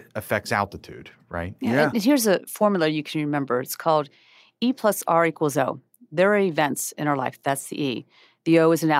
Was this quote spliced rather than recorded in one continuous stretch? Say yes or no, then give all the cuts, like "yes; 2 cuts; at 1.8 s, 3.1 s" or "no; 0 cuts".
no; 0 cuts